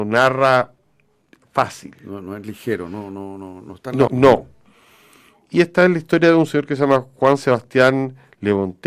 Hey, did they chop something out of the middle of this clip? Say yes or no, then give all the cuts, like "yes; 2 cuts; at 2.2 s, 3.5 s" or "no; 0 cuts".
yes; 1 cut; at 4.1 s